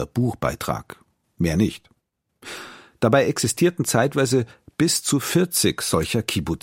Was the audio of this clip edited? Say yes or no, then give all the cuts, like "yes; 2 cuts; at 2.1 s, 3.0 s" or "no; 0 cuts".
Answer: no; 0 cuts